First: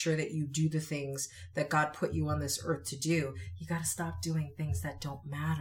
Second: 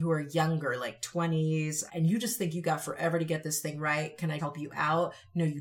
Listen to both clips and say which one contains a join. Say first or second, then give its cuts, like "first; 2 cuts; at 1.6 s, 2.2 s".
second; 2 cuts; at 1.9 s, 4.4 s